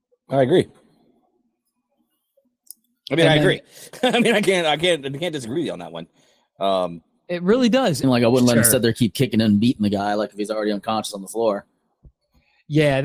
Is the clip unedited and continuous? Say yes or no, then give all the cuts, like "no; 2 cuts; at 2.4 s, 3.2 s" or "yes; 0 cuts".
no; 1 cut; at 8.0 s